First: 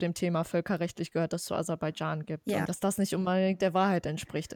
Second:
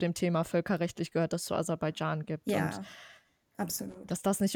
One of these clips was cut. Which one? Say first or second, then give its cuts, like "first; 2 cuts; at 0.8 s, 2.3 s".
first; 1 cut; at 2.6 s